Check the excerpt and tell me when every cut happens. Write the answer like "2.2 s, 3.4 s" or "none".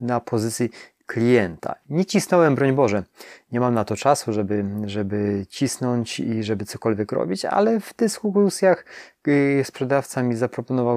none